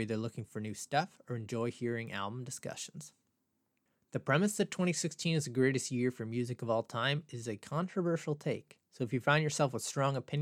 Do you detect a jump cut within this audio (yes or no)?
no